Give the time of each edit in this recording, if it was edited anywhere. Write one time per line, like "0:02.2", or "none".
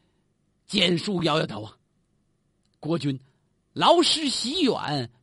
none